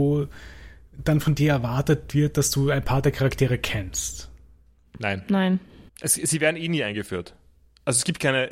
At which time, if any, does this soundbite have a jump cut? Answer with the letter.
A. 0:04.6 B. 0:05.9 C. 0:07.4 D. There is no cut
B